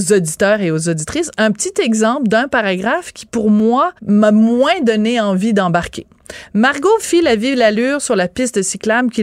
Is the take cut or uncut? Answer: cut